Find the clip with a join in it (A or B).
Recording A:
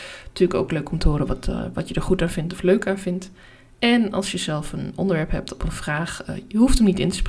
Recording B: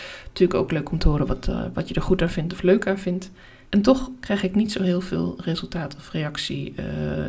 B